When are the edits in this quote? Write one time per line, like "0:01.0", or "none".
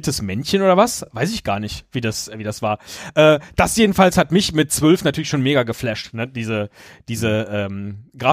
none